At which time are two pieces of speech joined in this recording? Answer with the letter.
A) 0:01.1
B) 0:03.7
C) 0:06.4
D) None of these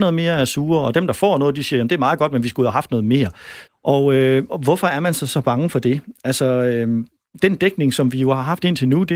B